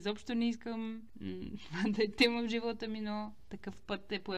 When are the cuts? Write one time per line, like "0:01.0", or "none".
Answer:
none